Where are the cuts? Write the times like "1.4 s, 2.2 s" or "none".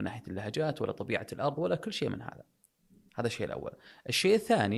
none